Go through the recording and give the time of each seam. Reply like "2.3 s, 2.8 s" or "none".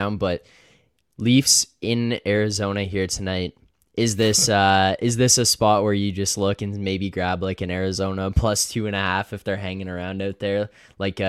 none